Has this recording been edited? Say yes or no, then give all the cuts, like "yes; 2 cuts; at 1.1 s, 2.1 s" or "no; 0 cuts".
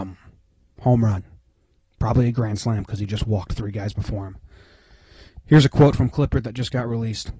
no; 0 cuts